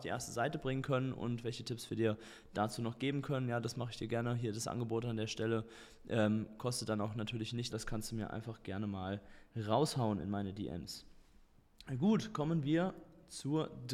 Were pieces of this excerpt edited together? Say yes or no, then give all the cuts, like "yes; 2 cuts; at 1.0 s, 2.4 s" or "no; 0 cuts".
yes; 1 cut; at 7.7 s